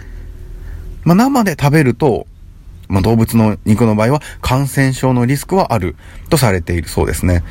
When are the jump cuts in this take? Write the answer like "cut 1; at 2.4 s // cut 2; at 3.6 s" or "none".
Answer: cut 1; at 1.0 s // cut 2; at 2.9 s

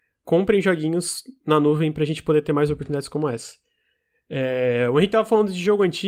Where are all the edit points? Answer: none

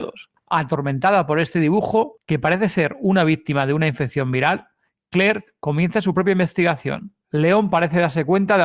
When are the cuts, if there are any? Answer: cut 1; at 7.2 s

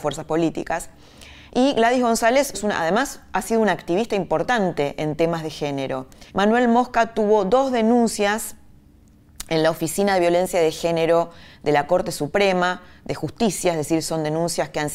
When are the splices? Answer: cut 1; at 2.5 s // cut 2; at 6.3 s

